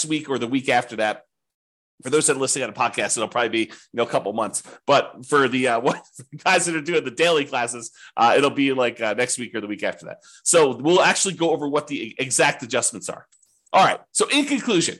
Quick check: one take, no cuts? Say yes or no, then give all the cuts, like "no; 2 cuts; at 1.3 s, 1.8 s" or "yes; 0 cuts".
yes; 0 cuts